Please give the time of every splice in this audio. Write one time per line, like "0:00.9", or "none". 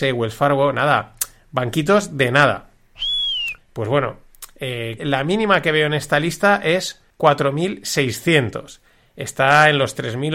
0:03.6
0:05.0
0:07.1

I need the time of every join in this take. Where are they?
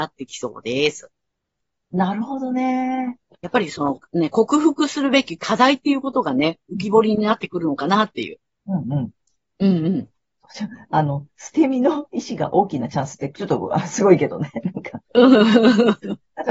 0:01.9
0:03.4

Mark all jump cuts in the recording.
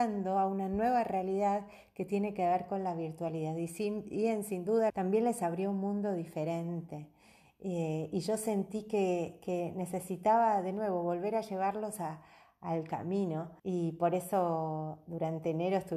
0:04.9
0:13.6

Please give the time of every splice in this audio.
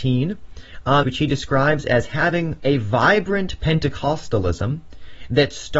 0:01.0
0:02.6

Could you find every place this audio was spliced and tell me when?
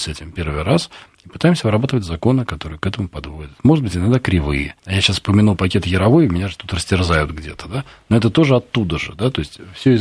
0:04.8

